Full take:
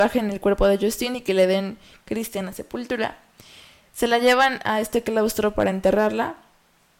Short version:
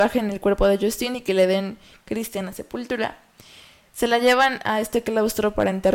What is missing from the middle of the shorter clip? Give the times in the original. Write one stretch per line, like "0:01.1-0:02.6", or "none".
none